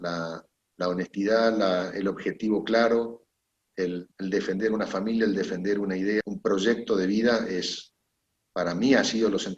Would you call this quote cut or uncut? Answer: cut